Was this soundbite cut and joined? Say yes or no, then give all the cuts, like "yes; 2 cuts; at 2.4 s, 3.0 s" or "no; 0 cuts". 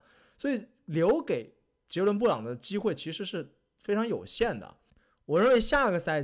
no; 0 cuts